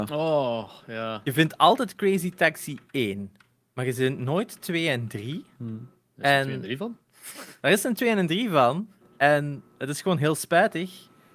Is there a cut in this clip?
no; 0 cuts

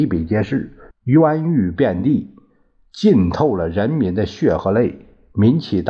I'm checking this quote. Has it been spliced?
yes; 1 cut; at 0.9 s

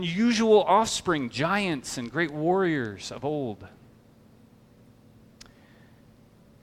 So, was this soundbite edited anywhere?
no; 0 cuts

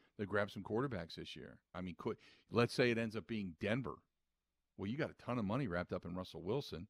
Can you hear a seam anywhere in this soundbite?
yes; 1 cut; at 1.7 s

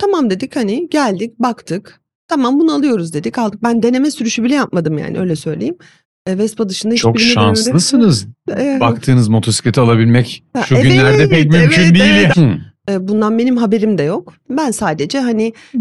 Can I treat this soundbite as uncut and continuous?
no; 1 cut; at 12.3 s

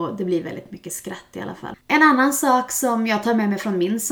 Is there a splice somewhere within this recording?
yes; 1 cut; at 1.8 s

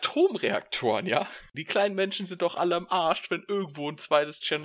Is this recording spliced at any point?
yes; 1 cut; at 1.5 s

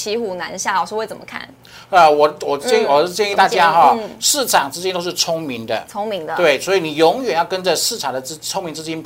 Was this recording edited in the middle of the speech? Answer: no; 0 cuts

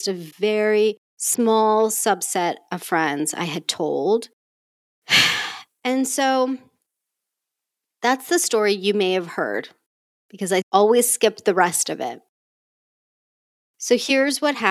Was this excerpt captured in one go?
no; 1 cut; at 4.5 s

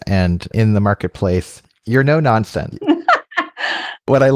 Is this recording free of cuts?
yes; 0 cuts

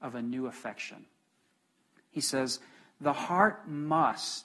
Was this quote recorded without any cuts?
no; 1 cut; at 1.9 s

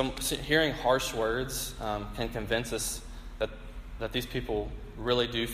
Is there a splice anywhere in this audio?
no; 0 cuts

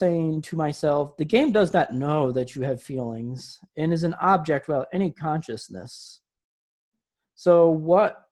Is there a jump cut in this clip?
no; 0 cuts

